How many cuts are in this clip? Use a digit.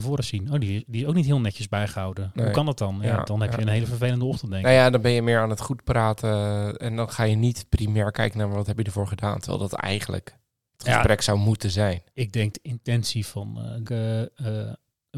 2